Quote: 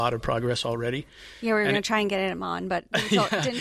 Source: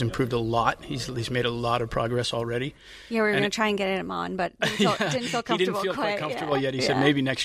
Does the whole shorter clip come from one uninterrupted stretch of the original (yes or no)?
yes